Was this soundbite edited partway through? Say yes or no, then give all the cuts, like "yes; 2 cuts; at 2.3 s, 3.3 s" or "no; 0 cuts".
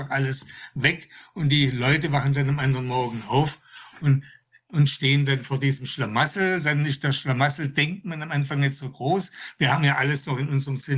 no; 0 cuts